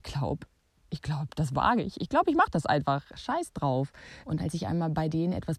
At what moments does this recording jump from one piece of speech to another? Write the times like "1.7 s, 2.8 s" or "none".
4.2 s

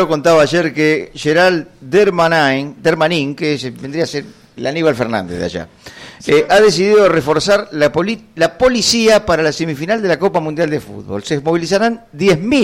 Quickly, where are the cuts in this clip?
4.6 s

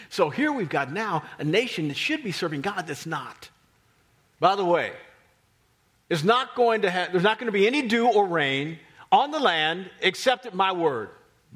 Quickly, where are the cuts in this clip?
4.3 s

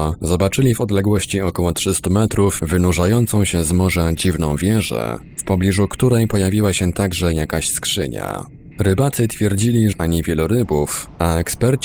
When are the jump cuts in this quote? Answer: 8.7 s, 9.9 s

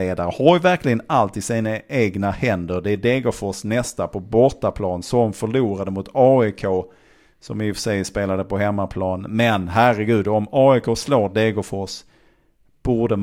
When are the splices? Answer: none

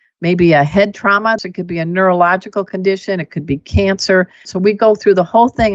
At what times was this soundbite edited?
1.4 s, 4.5 s

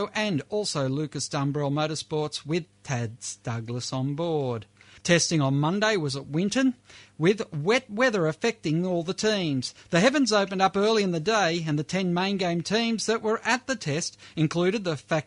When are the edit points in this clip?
5.0 s

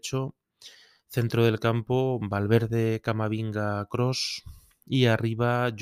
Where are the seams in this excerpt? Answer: none

